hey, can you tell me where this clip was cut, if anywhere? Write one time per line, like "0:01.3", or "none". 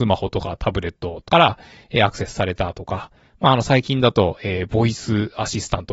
0:01.3